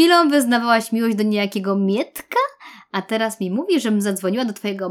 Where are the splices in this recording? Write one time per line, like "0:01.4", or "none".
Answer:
none